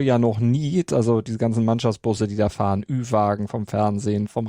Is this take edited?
no; 0 cuts

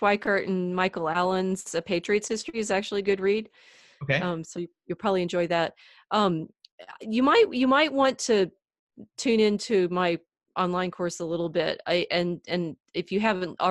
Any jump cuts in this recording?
no; 0 cuts

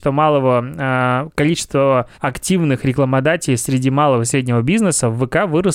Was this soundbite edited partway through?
yes; 1 cut; at 2.1 s

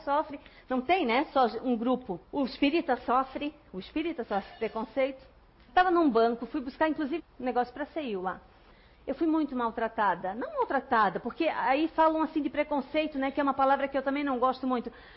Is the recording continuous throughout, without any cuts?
no; 3 cuts; at 2.2 s, 5.6 s, 7.2 s

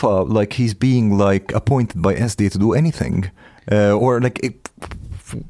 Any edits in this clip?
no; 0 cuts

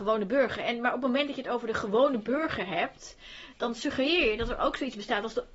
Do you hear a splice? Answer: yes; 1 cut; at 3.5 s

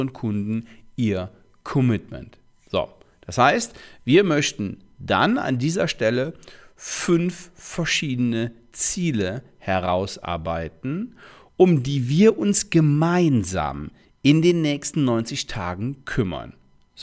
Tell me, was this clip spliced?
no; 0 cuts

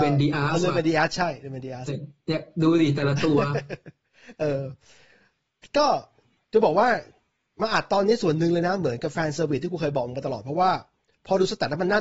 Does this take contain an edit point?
yes; 1 cut; at 1.9 s

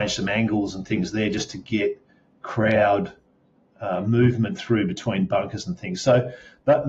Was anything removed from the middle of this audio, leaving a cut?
no; 0 cuts

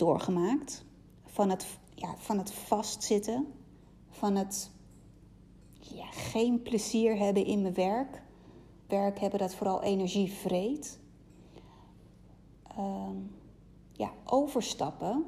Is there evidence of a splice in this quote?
yes; 1 cut; at 8.9 s

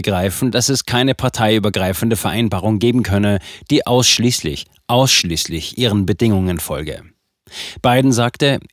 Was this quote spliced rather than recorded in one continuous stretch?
no; 0 cuts

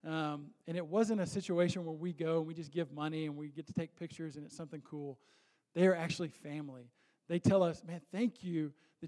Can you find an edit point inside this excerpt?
no; 0 cuts

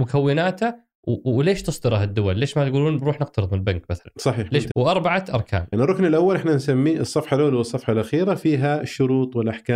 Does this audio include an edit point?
yes; 2 cuts; at 4.7 s, 5.7 s

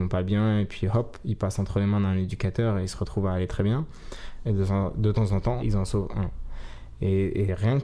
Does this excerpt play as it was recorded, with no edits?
no; 2 cuts; at 4.4 s, 5.6 s

